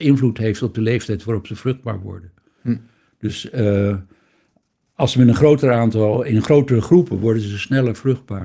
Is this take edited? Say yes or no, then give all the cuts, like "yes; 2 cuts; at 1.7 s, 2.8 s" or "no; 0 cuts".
no; 0 cuts